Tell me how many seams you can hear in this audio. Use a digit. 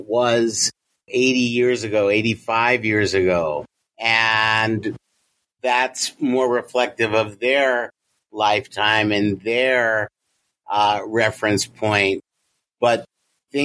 1